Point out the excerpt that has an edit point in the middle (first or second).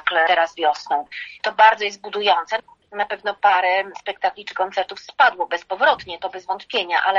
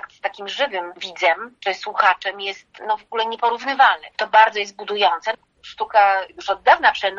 second